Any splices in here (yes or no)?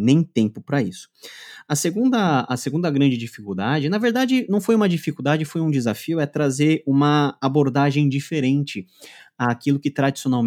no